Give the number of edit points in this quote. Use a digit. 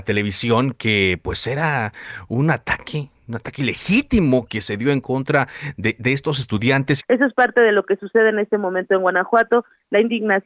1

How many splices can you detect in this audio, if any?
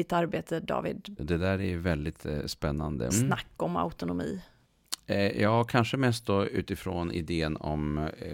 2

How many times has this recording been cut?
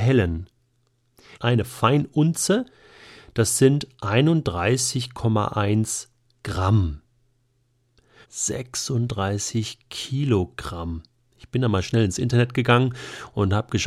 2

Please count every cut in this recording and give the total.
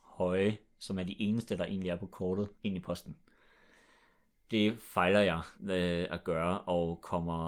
2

